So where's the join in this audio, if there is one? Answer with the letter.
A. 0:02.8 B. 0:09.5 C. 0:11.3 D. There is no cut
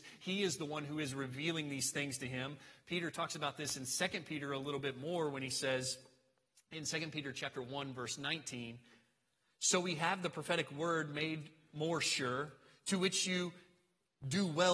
D